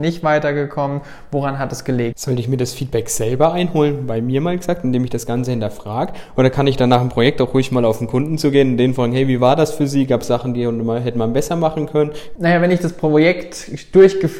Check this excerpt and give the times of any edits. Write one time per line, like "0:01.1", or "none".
0:02.1
0:12.4